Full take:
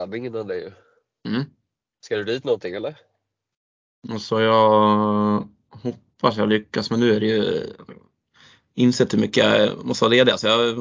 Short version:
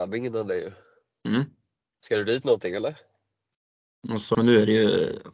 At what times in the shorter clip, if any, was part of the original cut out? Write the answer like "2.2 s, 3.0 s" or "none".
4.3 s

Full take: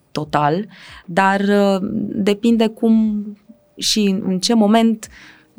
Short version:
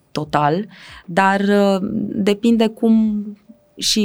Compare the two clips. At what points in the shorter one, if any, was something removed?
none

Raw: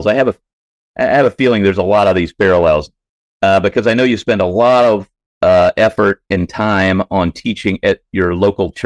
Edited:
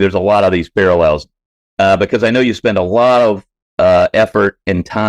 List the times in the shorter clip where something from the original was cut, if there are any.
none

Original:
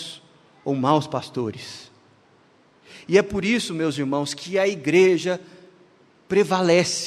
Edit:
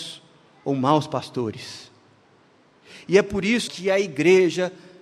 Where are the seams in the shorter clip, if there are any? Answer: 3.7 s

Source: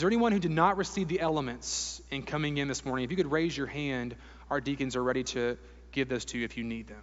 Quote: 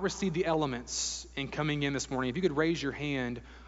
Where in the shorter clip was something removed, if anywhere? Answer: none

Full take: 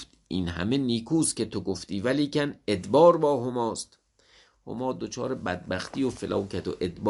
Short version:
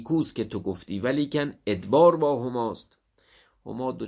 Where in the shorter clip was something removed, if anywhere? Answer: none

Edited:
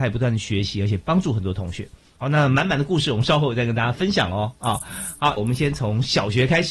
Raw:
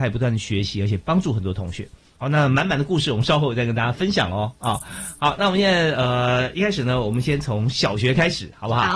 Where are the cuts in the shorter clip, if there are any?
5.4 s

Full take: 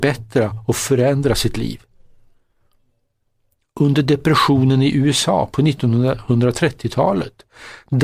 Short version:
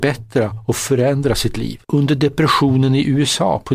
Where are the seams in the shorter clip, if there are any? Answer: 1.8 s

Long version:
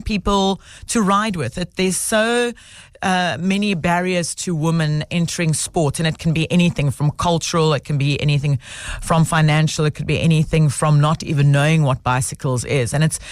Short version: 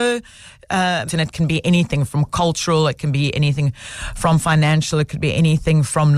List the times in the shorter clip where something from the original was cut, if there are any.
1.1 s

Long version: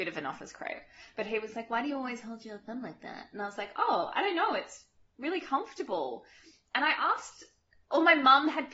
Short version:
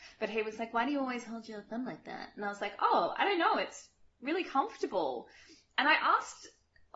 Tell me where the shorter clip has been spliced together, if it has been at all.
none

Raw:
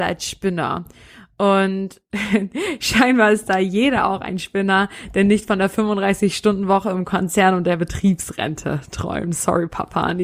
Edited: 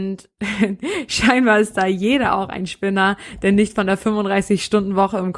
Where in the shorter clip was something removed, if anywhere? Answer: none

